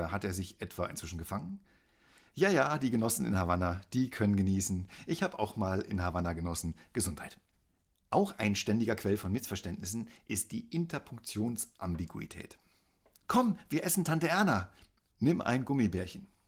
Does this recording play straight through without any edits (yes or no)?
no